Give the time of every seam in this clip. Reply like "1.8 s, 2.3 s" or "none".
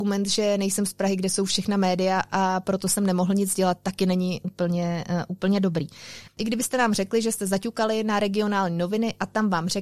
6.3 s